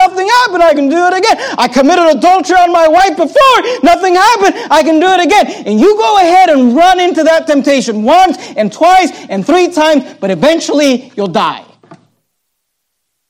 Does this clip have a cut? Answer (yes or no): no